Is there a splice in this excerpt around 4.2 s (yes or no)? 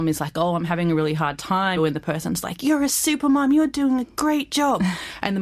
no